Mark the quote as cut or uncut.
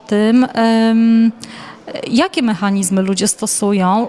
uncut